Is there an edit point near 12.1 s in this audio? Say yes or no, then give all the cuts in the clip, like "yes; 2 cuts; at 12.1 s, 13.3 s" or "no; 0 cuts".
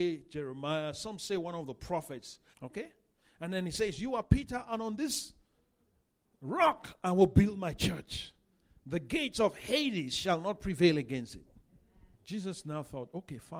yes; 2 cuts; at 2.5 s, 12.1 s